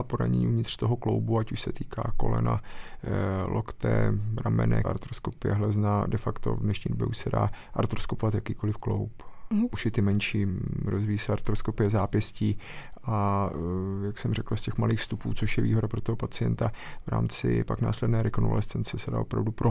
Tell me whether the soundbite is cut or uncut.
cut